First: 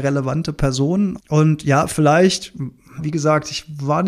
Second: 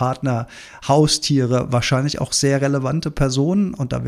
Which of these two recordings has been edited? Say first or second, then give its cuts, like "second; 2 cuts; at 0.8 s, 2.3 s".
first; 2 cuts; at 1.2 s, 3.0 s